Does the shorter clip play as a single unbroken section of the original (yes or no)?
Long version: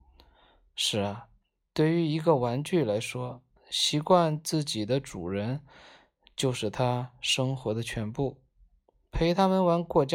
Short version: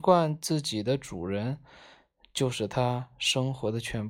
yes